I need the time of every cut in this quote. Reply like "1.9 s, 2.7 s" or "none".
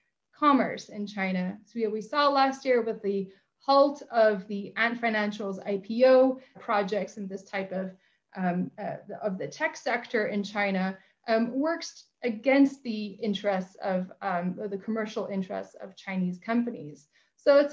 6.5 s